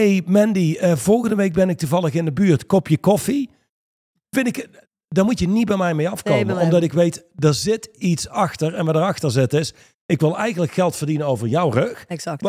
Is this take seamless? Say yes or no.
yes